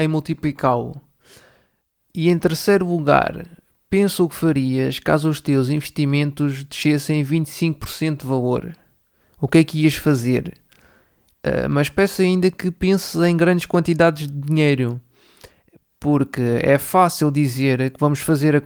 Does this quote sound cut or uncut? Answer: cut